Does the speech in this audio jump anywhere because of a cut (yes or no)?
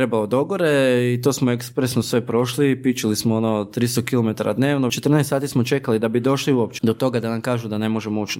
yes